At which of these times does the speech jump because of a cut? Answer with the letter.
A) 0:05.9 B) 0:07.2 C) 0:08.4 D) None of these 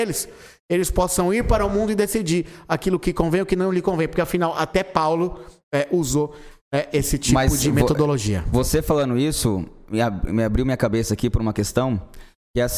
D